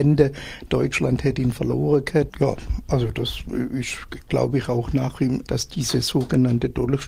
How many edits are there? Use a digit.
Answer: 2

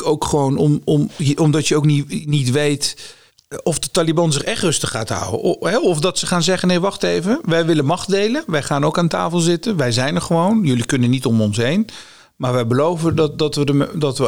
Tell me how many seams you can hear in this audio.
0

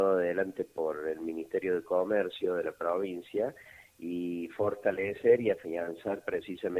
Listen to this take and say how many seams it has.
0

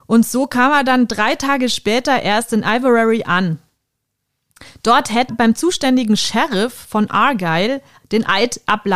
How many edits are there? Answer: 2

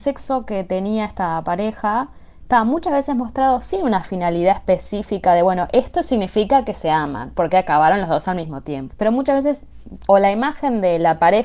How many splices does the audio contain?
2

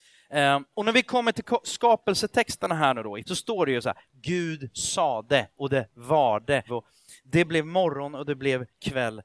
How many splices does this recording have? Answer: 2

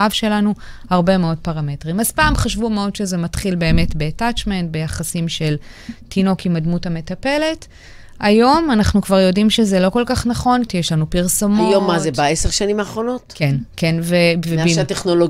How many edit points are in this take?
1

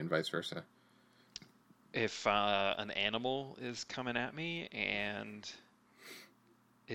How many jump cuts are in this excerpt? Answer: 0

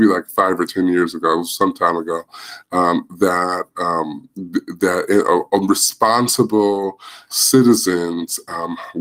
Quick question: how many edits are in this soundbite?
0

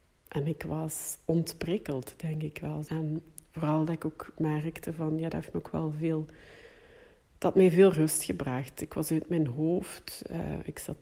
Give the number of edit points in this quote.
1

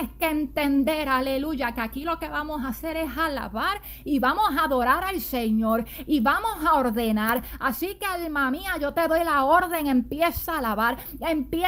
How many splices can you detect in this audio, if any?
0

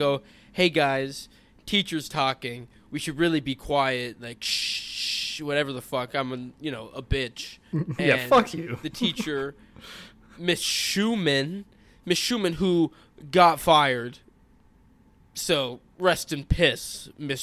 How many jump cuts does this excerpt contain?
1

